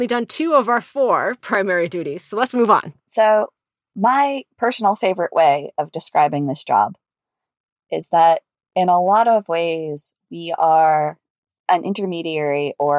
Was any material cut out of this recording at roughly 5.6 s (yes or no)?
no